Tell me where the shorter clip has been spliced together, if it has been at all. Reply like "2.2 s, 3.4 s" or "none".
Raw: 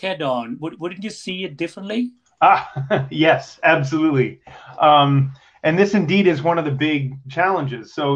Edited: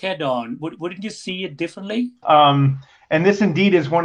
2.2 s